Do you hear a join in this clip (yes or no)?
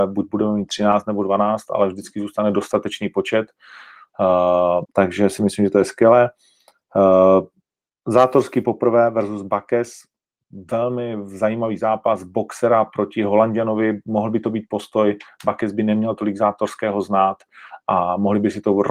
yes